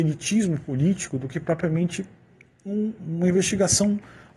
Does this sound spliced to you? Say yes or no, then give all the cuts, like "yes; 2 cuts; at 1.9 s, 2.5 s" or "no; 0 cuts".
yes; 1 cut; at 3.0 s